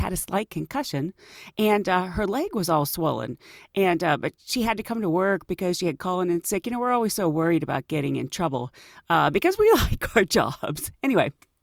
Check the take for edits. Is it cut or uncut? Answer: uncut